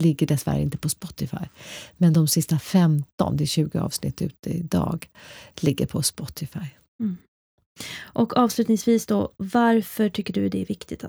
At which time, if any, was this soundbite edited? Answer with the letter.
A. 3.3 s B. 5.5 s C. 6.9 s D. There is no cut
D